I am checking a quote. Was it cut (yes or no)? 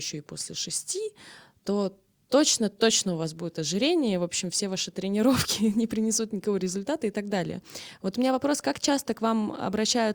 no